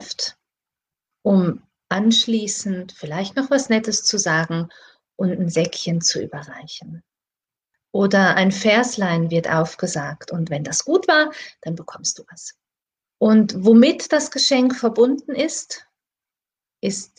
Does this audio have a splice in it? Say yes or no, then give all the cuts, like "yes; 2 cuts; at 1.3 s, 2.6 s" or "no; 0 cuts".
yes; 1 cut; at 13.0 s